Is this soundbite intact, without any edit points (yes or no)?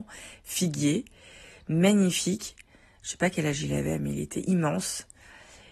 yes